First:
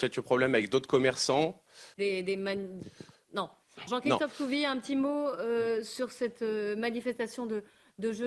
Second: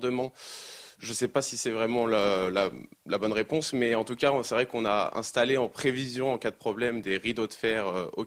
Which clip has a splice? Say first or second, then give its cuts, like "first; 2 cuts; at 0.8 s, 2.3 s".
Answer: first; 2 cuts; at 1.9 s, 3.9 s